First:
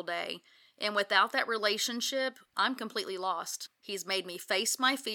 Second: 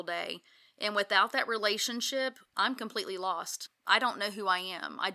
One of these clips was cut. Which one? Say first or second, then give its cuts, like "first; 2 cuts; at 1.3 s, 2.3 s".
first; 1 cut; at 3.8 s